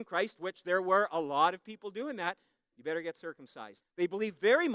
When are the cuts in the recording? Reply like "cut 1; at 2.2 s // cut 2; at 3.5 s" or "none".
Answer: cut 1; at 2.7 s // cut 2; at 3.8 s